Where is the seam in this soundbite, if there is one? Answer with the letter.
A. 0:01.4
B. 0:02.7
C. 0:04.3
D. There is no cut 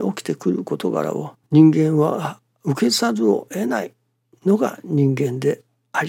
A